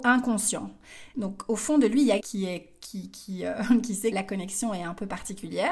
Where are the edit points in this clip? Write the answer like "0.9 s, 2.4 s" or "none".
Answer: 1.1 s, 2.2 s, 4.1 s